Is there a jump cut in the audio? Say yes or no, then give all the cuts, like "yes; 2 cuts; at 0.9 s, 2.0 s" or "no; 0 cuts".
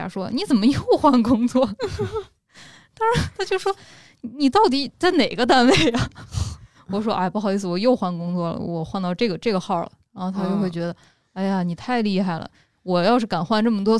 no; 0 cuts